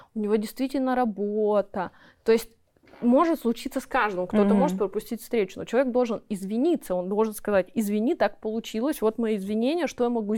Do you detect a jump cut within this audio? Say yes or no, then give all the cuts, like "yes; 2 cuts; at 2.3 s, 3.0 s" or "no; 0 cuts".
no; 0 cuts